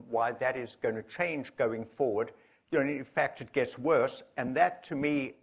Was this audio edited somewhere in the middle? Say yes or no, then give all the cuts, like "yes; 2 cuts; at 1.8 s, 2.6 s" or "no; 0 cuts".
no; 0 cuts